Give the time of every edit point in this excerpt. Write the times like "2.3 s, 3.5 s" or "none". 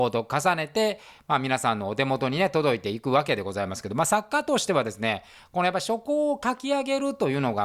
none